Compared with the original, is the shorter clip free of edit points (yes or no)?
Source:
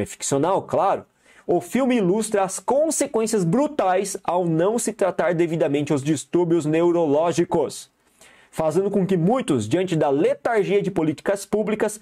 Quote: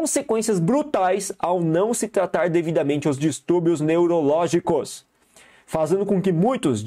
yes